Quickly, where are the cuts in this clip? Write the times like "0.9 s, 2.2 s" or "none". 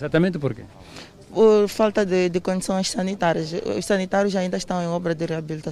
none